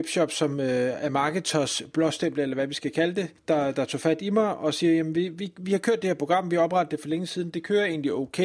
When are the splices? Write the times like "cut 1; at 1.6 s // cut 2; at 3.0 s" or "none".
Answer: cut 1; at 3.4 s